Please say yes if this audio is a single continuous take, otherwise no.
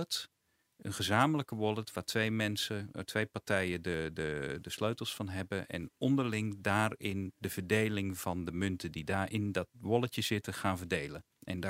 yes